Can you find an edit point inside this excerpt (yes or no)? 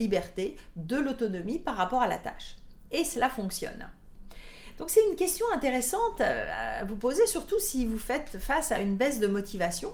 no